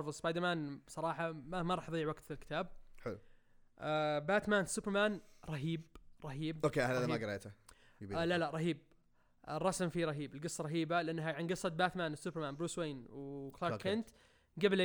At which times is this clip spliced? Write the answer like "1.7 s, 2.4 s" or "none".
none